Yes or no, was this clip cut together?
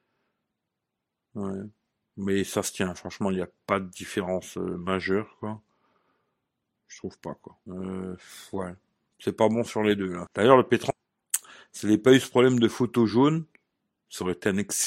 yes